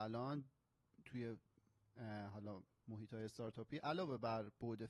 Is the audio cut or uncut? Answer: uncut